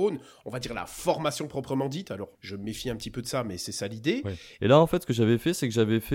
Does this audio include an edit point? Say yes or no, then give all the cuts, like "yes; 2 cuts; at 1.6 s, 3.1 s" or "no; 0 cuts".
yes; 2 cuts; at 2.3 s, 4.6 s